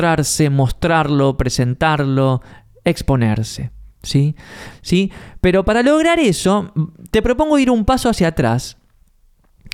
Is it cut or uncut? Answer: cut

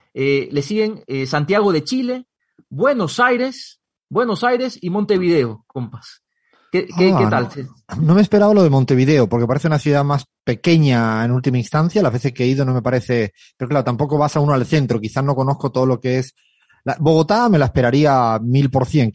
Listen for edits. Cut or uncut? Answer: uncut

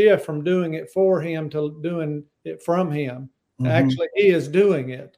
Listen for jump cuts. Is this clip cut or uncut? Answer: uncut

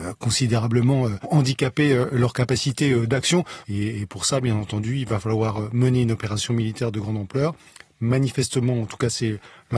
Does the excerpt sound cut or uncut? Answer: cut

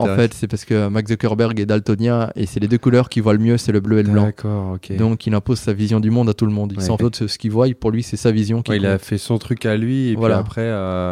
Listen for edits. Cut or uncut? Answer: cut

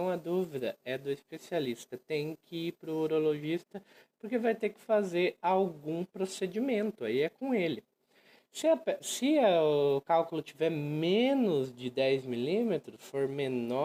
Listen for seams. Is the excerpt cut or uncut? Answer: uncut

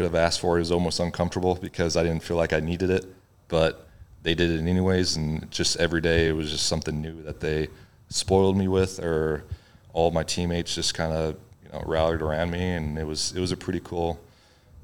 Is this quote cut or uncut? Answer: uncut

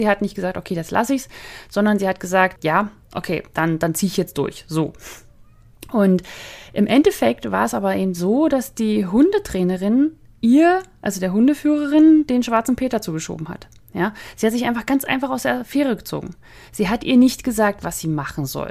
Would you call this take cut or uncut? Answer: uncut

